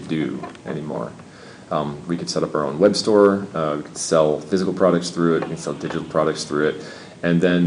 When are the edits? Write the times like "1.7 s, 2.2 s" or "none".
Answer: none